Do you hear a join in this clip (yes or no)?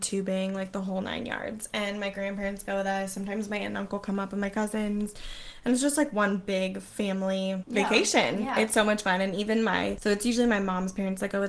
no